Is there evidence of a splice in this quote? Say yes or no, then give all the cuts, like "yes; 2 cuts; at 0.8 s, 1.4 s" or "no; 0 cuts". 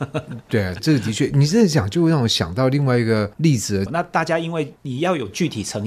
yes; 1 cut; at 3.9 s